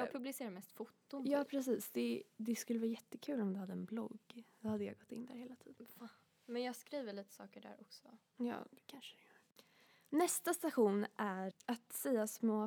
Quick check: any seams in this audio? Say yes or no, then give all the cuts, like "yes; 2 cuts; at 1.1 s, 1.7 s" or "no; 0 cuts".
yes; 1 cut; at 11.5 s